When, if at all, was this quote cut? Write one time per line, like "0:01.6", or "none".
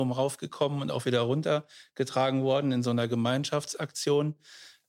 none